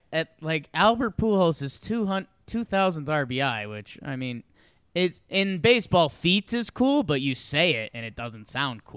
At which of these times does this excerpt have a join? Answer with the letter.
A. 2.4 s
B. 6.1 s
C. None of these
C